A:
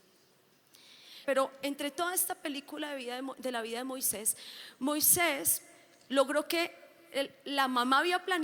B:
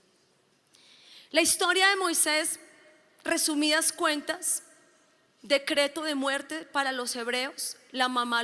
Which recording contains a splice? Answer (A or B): A